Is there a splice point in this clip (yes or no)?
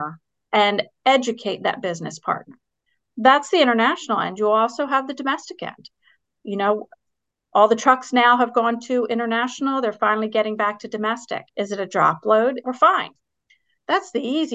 yes